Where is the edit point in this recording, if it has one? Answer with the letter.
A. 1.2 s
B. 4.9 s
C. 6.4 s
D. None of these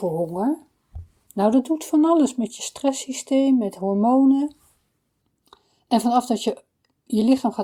D